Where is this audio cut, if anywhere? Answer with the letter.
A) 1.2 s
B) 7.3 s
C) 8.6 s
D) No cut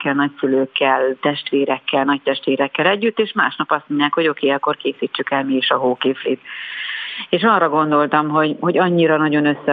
B